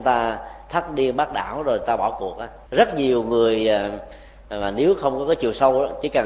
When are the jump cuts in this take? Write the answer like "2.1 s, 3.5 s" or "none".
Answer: 2.7 s